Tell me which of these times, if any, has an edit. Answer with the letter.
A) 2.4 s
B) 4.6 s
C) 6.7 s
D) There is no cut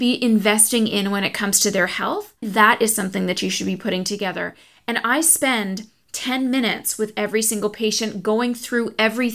A